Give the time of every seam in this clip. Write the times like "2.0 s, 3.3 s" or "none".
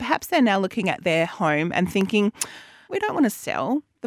2.9 s

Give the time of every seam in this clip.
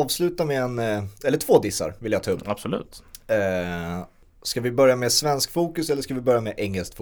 1.2 s

